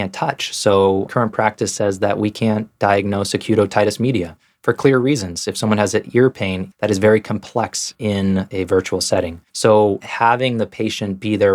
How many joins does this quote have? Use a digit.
2